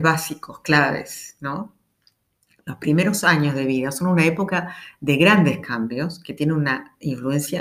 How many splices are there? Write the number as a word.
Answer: zero